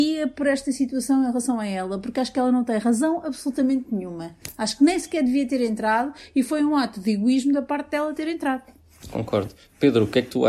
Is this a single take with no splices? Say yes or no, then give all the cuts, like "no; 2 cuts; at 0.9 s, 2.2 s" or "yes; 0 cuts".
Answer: yes; 0 cuts